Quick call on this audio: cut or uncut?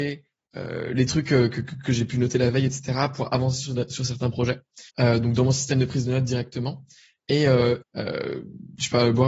cut